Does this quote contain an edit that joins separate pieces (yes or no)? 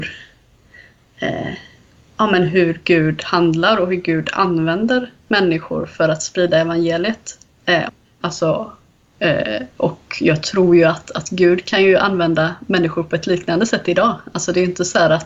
yes